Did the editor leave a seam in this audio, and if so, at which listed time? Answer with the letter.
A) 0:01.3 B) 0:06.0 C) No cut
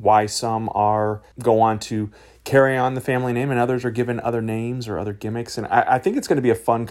A